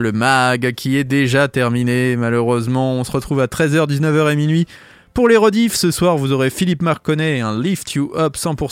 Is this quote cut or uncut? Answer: uncut